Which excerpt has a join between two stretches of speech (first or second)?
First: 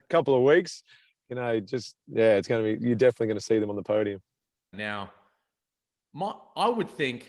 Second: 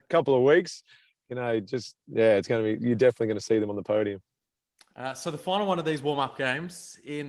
first